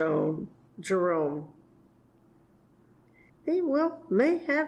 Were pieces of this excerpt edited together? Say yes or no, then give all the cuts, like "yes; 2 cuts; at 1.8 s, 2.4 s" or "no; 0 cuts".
yes; 1 cut; at 3.3 s